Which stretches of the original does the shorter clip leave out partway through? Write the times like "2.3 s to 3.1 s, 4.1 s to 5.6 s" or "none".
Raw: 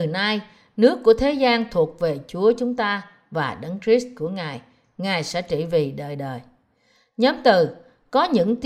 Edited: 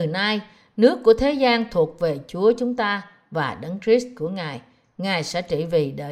none